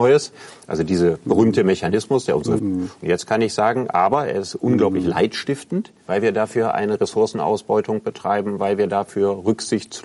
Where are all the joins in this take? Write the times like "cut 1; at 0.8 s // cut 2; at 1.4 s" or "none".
cut 1; at 2.6 s // cut 2; at 6.0 s